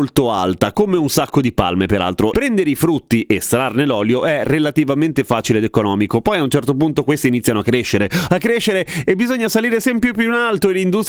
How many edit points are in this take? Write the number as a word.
two